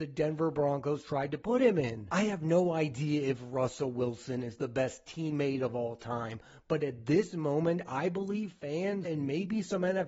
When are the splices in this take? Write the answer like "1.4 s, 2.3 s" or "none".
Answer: 9.0 s